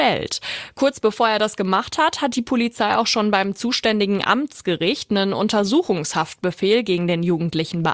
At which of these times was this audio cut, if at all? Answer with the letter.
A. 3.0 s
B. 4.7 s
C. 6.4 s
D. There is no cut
D